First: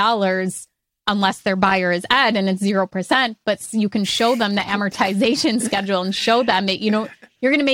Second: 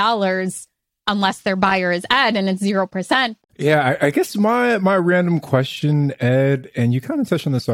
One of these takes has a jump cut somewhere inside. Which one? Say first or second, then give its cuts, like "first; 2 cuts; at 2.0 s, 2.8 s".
second; 1 cut; at 3.4 s